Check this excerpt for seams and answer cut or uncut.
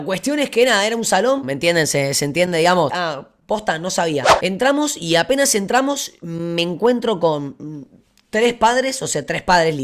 cut